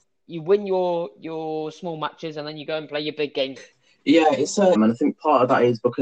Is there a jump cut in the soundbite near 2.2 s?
no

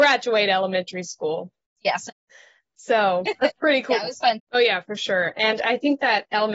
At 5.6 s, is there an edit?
no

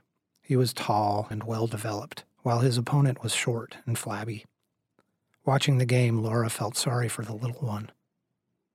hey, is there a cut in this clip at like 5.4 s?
no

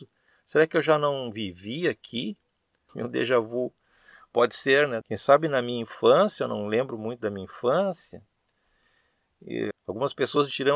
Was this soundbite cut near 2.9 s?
yes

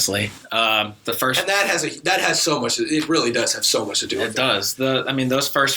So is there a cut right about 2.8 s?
no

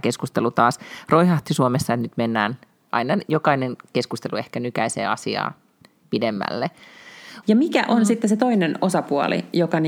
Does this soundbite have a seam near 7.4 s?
yes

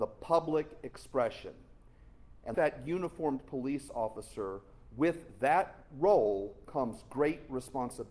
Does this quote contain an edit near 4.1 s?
no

